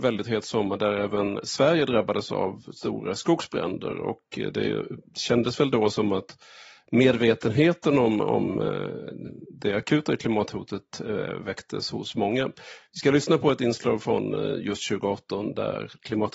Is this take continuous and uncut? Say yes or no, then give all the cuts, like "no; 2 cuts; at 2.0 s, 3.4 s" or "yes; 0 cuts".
yes; 0 cuts